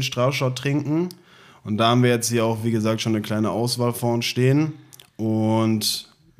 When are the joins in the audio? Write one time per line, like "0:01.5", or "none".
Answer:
none